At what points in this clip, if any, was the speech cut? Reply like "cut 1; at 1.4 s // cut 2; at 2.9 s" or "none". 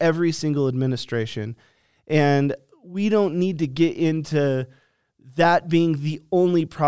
none

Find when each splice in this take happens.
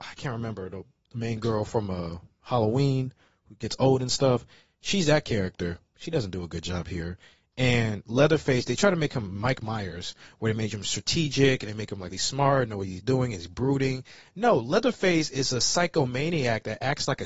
cut 1; at 12.1 s

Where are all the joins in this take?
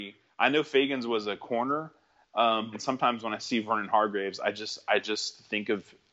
cut 1; at 2.7 s

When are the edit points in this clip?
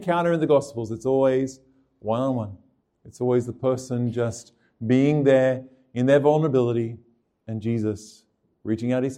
none

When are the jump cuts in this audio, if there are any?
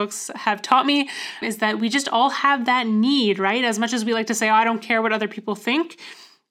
cut 1; at 1.4 s

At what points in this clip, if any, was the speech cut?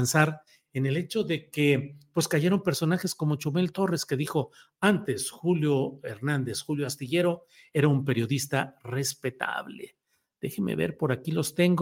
none

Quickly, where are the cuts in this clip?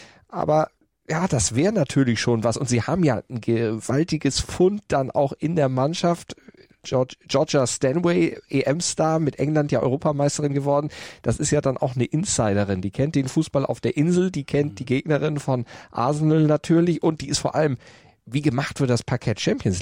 none

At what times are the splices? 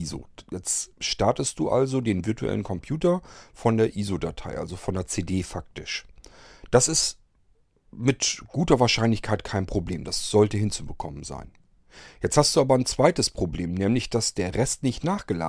none

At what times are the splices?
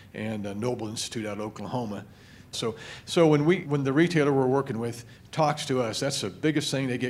cut 1; at 2.5 s // cut 2; at 3.6 s

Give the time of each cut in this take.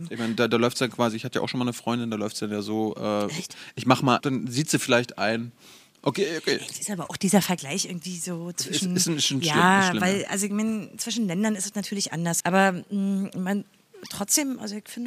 cut 1; at 4.2 s // cut 2; at 12.4 s

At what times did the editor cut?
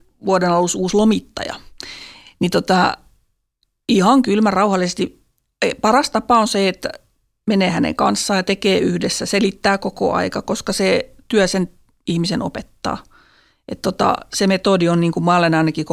none

